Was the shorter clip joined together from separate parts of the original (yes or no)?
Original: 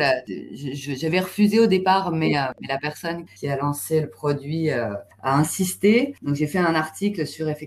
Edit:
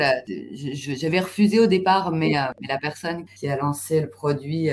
no